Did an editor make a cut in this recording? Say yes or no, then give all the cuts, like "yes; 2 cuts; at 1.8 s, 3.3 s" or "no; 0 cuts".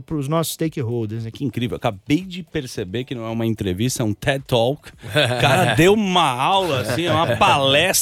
yes; 1 cut; at 1.3 s